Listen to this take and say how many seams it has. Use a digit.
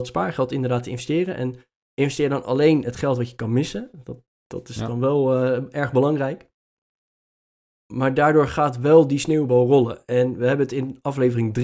0